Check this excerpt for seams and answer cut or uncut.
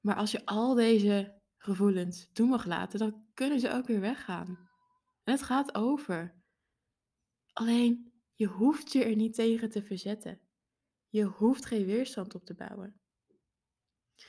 uncut